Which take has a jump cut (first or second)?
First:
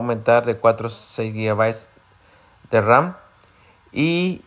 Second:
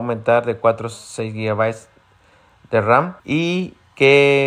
second